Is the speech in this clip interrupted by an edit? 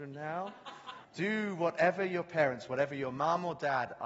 yes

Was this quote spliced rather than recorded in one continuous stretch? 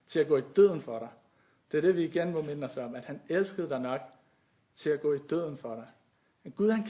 no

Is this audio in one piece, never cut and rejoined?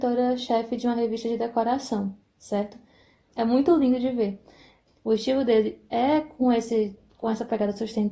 no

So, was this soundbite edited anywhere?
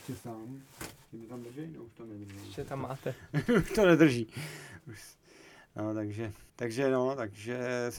yes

